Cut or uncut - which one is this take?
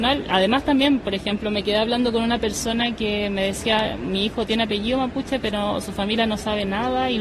uncut